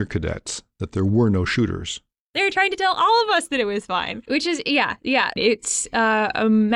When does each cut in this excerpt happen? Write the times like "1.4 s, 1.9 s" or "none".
none